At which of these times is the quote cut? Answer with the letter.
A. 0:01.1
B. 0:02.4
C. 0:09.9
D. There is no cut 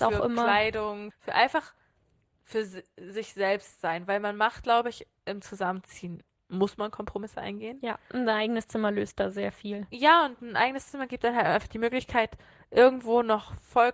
A